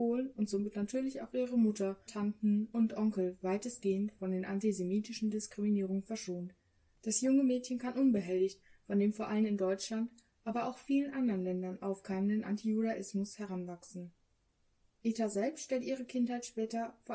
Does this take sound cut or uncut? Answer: cut